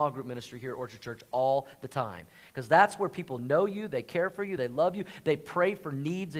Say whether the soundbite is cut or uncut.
uncut